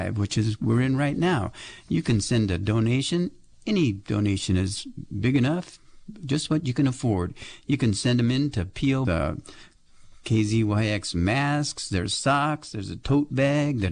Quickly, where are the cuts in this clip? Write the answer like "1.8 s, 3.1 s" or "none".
9.0 s